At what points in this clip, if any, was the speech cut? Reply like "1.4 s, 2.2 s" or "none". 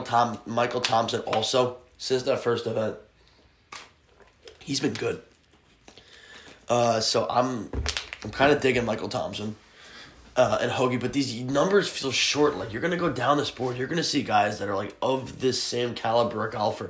none